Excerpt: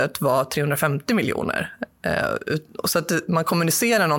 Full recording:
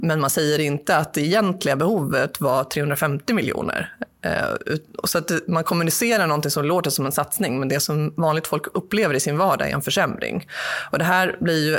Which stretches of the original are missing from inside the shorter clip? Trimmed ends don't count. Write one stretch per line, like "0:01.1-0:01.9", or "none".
none